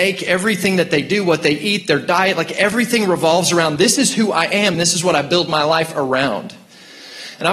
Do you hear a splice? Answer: yes; 1 cut; at 4.7 s

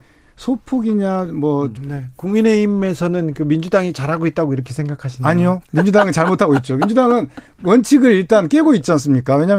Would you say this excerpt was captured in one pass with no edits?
no; 1 cut; at 1.8 s

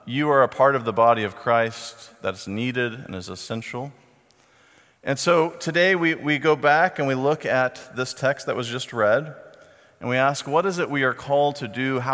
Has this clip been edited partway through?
no; 0 cuts

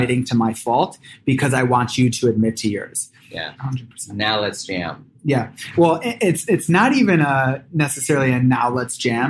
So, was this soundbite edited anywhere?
yes; 1 cut; at 3.6 s

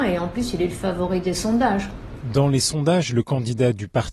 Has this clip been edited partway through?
no; 0 cuts

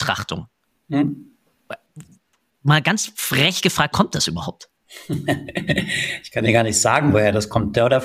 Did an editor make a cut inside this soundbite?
yes; 1 cut; at 3.9 s

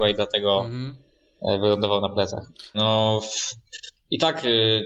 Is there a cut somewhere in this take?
yes; 1 cut; at 2.7 s

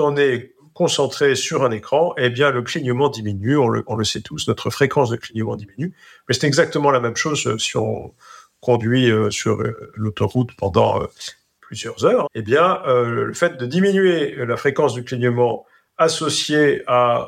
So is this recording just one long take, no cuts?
no; 1 cut; at 12.2 s

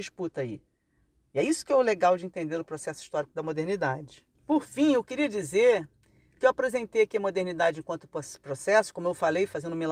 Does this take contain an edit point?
yes; 1 cut; at 4.4 s

